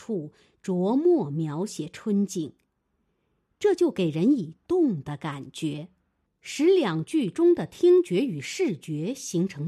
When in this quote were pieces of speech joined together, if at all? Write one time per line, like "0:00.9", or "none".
0:06.4